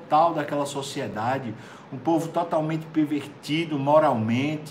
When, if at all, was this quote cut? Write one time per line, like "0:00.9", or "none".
none